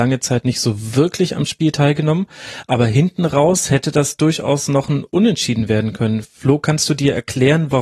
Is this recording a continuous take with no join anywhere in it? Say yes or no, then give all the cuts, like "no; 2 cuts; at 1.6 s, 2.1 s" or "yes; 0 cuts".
yes; 0 cuts